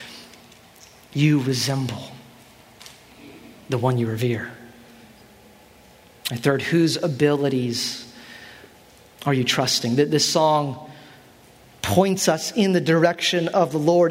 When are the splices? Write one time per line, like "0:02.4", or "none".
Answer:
none